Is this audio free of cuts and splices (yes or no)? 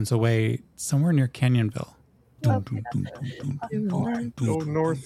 no